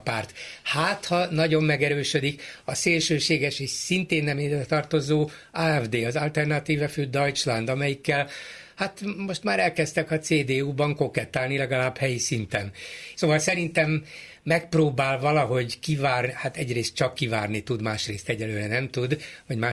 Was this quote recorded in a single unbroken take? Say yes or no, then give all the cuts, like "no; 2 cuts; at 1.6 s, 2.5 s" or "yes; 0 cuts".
no; 1 cut; at 13.1 s